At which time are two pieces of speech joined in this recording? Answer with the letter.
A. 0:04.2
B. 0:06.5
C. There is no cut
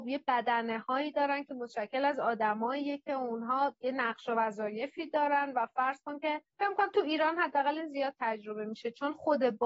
B